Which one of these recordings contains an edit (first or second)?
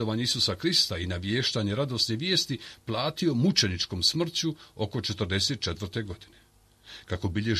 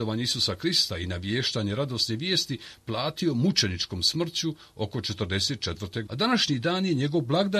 second